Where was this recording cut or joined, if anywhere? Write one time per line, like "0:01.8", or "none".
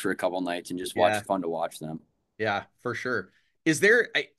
0:01.2